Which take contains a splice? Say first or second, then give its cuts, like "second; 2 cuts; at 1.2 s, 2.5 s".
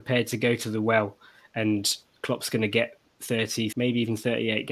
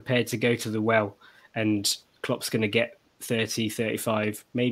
first; 1 cut; at 3.7 s